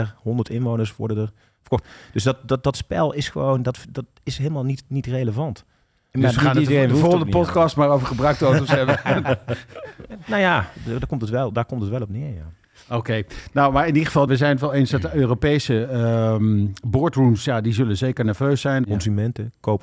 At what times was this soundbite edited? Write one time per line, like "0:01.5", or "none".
0:14.3
0:18.8